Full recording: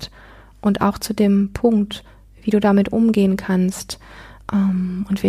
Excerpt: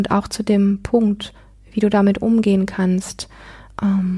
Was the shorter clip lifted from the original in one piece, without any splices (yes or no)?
yes